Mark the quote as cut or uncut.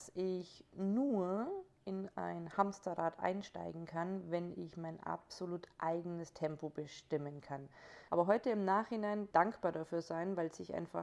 cut